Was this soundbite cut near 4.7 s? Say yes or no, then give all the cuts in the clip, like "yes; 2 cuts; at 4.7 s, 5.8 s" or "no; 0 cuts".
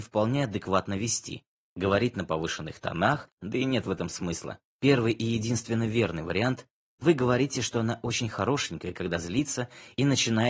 yes; 2 cuts; at 3.4 s, 4.7 s